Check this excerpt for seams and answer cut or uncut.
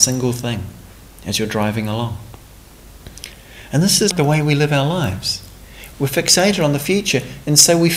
cut